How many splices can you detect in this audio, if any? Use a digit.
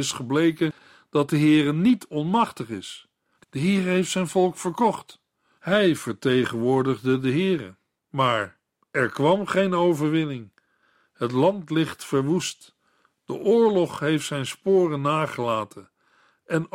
3